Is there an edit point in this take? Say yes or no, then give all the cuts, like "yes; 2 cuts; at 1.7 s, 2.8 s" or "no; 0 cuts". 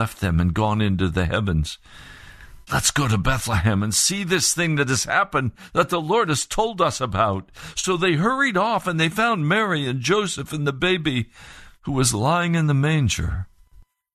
yes; 1 cut; at 2.7 s